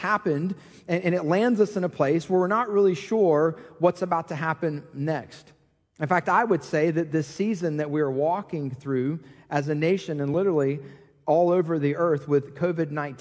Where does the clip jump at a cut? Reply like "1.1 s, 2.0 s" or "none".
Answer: none